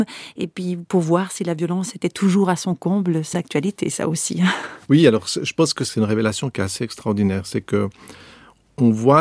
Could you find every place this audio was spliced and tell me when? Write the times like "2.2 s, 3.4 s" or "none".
3.3 s